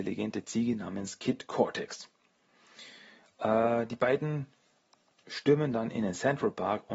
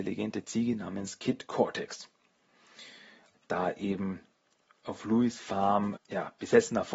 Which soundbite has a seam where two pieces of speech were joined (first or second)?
second